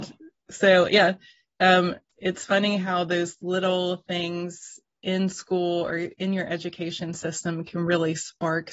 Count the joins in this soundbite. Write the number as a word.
zero